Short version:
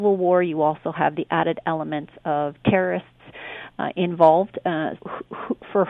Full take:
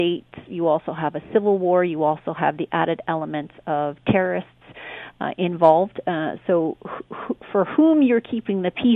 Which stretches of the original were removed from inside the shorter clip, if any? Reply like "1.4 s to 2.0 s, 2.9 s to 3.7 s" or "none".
6.4 s to 6.8 s